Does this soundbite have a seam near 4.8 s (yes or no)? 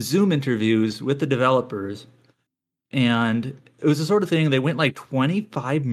no